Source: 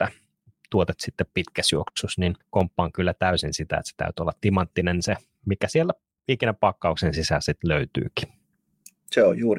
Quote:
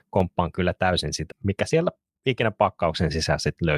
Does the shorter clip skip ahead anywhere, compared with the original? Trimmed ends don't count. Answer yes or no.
yes